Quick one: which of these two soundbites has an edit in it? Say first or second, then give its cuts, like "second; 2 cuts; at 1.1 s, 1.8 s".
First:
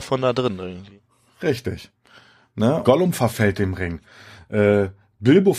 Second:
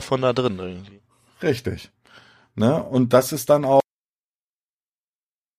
first; 1 cut; at 2.8 s